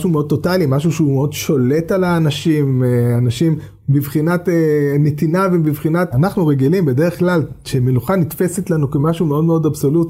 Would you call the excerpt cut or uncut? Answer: cut